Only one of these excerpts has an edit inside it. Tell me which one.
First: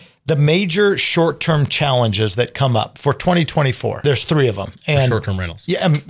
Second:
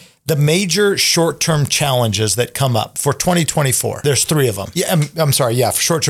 second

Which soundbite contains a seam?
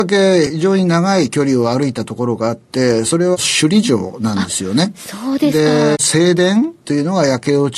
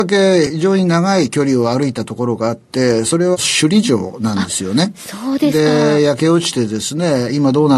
first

